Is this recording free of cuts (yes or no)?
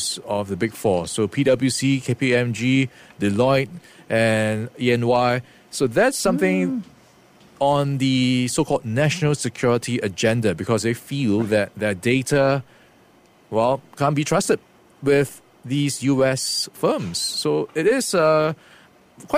yes